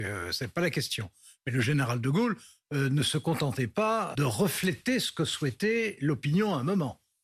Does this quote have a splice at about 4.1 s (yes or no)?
yes